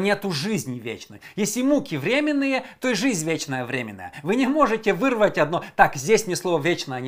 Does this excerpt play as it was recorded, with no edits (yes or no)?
yes